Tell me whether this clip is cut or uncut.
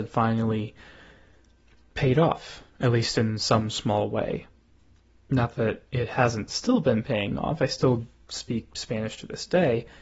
uncut